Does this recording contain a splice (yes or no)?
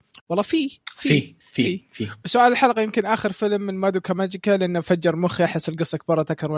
no